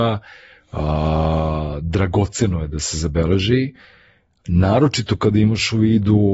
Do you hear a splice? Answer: no; 0 cuts

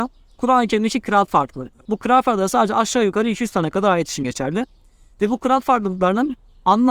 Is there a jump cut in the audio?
yes; 1 cut; at 1.8 s

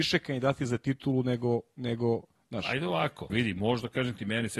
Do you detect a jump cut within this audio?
yes; 1 cut; at 3.3 s

